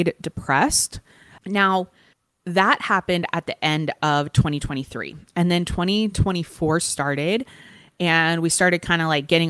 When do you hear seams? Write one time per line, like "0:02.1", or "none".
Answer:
0:01.4